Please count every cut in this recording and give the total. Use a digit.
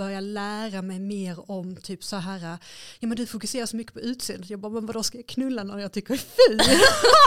0